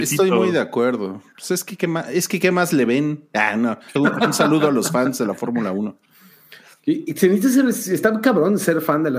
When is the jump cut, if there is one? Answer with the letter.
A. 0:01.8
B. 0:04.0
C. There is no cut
B